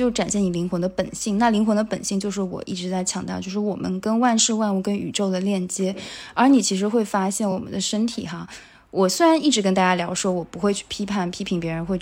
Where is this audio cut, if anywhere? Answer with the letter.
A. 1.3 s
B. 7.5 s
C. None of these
C